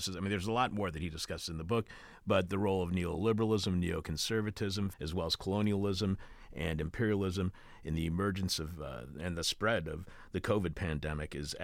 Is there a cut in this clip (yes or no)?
yes